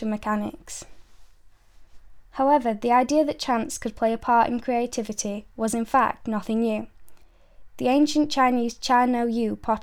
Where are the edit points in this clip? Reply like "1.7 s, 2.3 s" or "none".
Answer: none